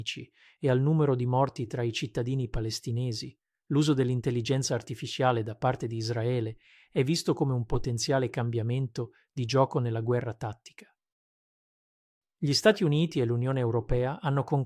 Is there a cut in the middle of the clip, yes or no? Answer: yes